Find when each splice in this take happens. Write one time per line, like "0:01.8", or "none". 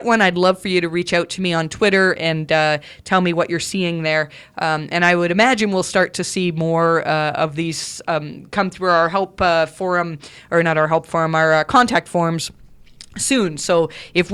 none